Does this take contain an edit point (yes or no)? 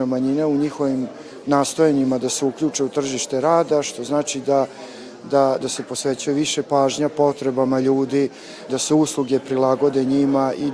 yes